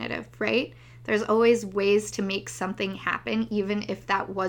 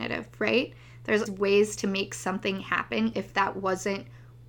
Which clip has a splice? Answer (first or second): second